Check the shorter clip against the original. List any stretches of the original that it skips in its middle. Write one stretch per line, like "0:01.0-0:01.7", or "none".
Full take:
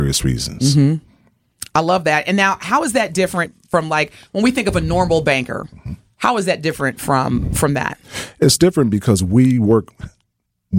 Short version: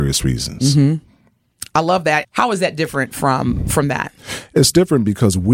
0:02.2-0:06.1